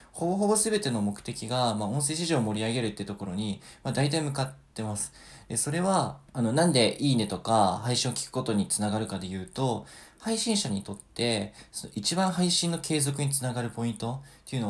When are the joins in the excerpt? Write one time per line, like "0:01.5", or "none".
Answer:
0:06.3